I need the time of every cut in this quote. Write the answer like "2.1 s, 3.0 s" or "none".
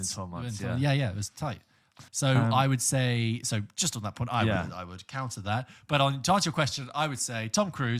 2.1 s